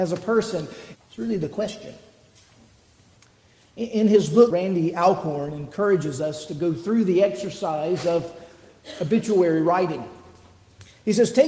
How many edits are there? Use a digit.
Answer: 2